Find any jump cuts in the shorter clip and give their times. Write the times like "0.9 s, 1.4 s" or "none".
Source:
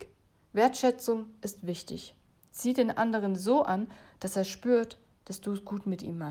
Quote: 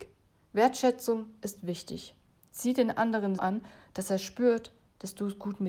3.4 s